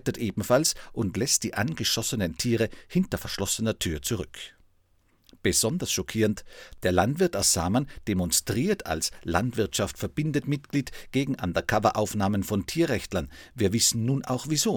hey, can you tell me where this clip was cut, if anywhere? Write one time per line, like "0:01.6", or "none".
none